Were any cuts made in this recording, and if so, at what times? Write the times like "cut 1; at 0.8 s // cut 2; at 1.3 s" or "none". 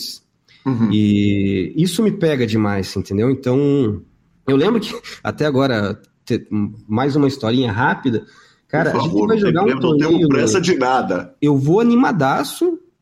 cut 1; at 11.4 s